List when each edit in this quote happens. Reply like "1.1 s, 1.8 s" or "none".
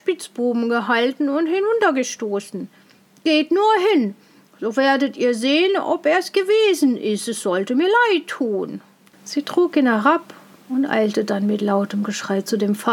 9.1 s